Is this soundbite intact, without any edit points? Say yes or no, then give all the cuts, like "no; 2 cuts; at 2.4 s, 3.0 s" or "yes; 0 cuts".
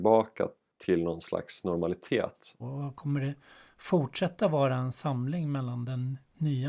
no; 1 cut; at 2.6 s